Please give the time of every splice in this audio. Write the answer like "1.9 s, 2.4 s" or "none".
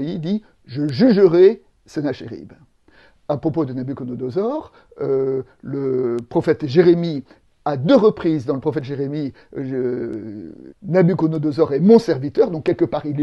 10.7 s